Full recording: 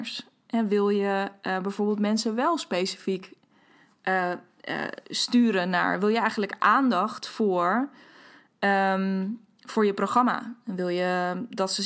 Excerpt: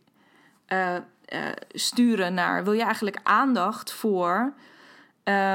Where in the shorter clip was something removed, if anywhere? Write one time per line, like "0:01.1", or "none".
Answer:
none